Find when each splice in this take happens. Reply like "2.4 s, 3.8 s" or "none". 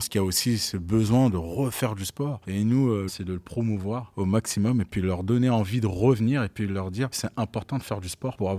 3.1 s, 7.1 s